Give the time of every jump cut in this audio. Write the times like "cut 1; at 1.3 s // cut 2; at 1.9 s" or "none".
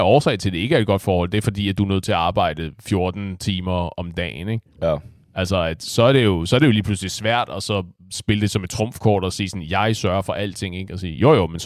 none